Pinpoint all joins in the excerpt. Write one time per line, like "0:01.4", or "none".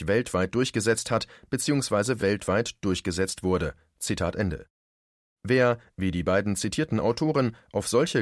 none